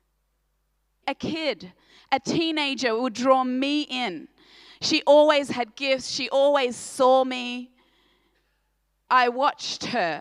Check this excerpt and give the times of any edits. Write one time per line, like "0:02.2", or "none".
0:01.0
0:09.1